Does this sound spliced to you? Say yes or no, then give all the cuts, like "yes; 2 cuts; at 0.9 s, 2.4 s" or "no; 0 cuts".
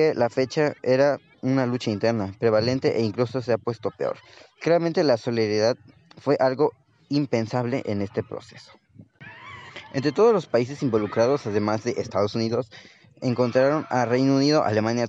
no; 0 cuts